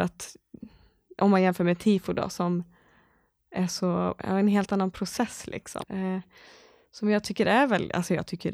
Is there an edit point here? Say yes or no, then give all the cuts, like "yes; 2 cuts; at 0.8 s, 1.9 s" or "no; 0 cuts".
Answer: yes; 1 cut; at 5.8 s